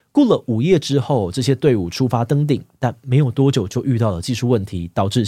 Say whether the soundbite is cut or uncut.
uncut